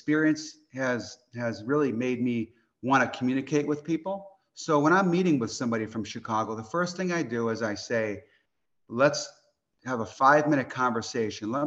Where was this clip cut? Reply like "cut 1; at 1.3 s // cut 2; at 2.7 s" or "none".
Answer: none